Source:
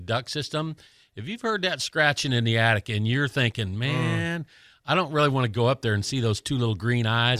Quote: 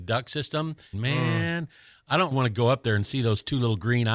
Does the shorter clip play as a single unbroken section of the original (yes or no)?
no